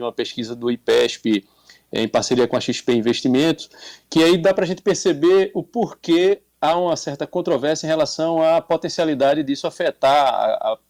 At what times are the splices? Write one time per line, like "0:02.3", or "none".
none